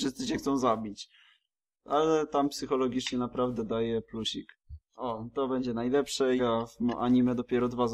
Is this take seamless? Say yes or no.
no